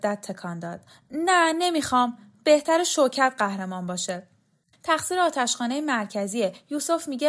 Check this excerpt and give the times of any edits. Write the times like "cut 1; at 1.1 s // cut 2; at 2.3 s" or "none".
cut 1; at 4.7 s